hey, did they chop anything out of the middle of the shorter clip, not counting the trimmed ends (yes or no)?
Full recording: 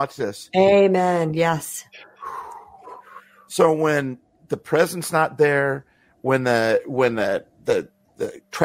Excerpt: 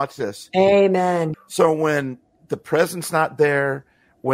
yes